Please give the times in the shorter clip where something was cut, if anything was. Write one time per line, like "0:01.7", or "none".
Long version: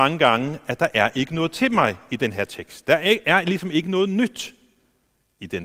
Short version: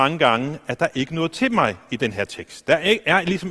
0:00.9